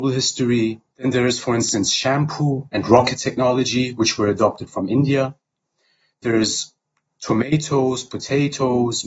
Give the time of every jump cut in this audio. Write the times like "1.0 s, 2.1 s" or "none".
0.9 s